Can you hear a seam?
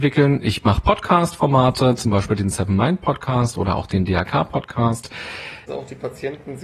yes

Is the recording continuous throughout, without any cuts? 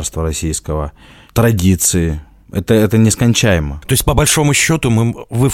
yes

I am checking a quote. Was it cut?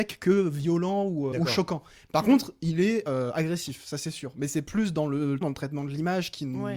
yes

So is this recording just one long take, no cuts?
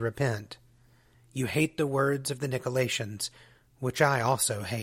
no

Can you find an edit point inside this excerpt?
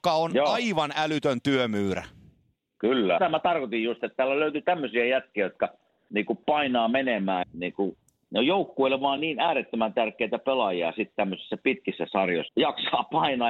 yes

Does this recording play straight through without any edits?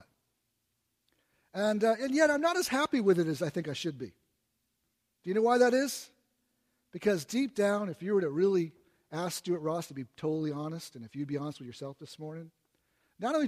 yes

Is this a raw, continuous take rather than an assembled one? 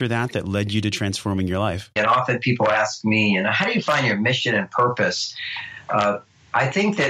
no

